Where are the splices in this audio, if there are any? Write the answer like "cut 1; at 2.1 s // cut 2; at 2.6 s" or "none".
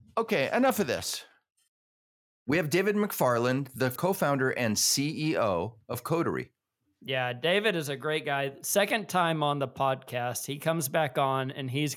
none

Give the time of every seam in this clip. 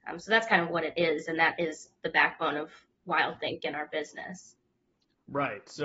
none

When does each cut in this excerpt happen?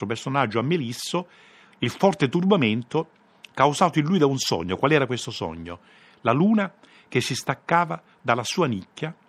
none

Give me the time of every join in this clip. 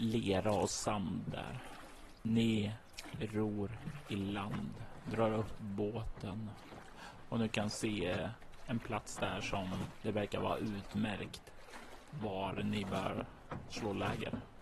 none

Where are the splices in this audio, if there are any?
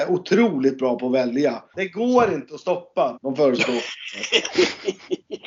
cut 1; at 1.7 s // cut 2; at 3.2 s

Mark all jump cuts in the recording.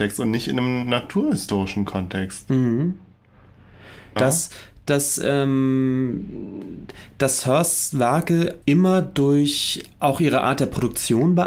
cut 1; at 4.2 s // cut 2; at 8.6 s

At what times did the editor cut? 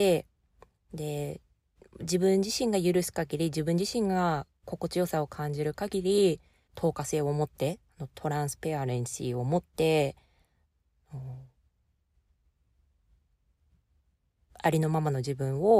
cut 1; at 6.7 s

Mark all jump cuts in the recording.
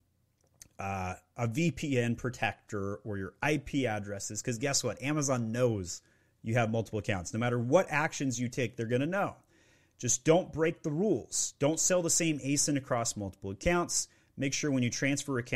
none

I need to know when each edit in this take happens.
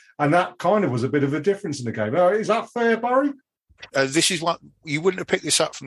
cut 1; at 3.9 s

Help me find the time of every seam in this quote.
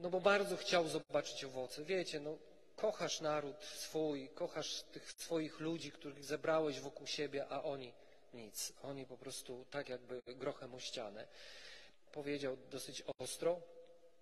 cut 1; at 12.1 s

